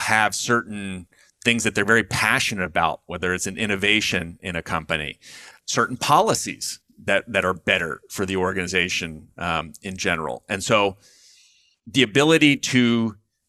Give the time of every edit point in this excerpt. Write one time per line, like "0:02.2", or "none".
0:05.5